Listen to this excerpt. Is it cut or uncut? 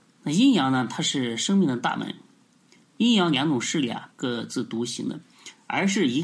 cut